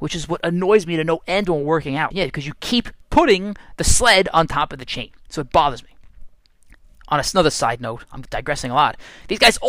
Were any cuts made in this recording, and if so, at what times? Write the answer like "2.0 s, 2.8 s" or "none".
2.1 s

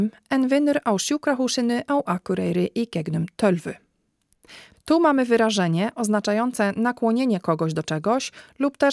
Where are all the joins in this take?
4.7 s

